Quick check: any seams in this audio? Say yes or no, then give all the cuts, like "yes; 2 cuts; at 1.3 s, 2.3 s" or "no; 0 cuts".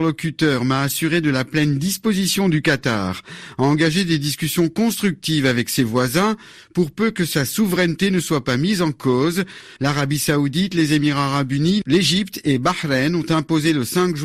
yes; 1 cut; at 9.8 s